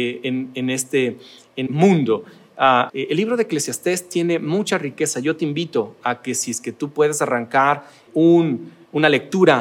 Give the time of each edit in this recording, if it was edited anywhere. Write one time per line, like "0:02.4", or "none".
0:01.7
0:02.9
0:08.1

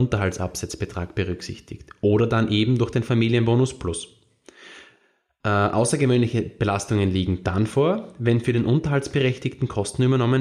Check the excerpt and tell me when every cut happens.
none

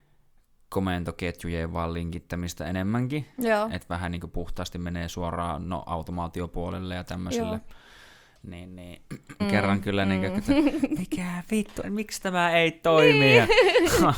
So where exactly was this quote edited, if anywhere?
0:09.4
0:11.8

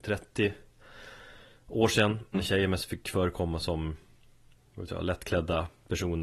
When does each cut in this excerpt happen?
0:02.3

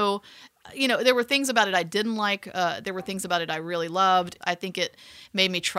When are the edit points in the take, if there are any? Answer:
0:04.4

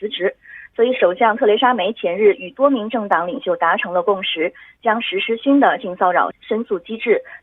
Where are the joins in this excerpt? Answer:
0:06.3

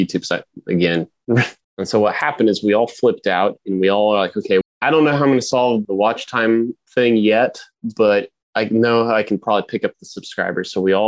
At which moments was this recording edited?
0:01.6
0:04.6
0:05.8

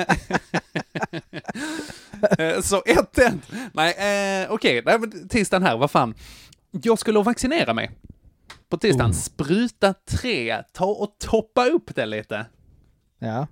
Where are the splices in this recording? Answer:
none

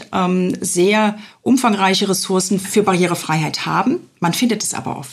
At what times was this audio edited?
none

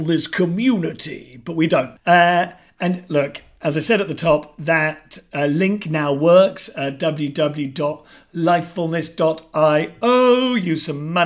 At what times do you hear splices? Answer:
0:02.0

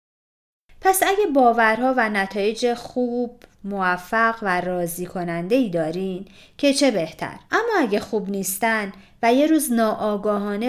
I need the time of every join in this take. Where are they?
0:07.4

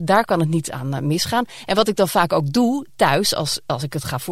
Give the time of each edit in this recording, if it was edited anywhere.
none

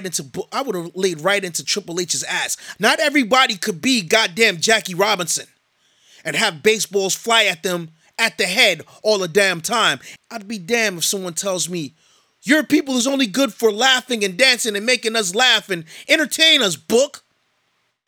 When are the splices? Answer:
0:02.7
0:10.2

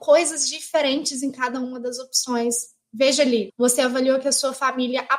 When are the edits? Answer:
0:03.5

